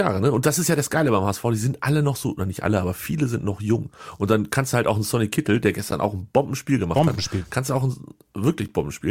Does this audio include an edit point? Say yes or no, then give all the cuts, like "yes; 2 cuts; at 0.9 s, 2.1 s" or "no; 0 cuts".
no; 0 cuts